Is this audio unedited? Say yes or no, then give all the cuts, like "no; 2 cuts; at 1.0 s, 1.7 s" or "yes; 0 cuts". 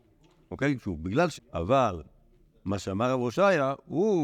no; 1 cut; at 1.4 s